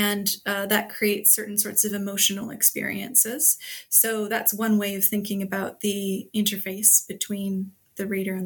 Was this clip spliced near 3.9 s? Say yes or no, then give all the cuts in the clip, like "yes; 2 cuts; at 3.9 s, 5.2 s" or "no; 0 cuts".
no; 0 cuts